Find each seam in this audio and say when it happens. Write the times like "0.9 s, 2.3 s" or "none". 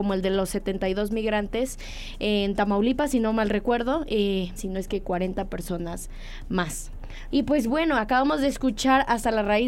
4.6 s, 7.3 s